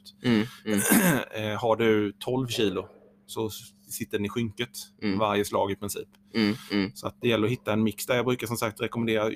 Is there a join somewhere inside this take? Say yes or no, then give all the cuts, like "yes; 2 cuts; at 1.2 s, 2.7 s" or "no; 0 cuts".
no; 0 cuts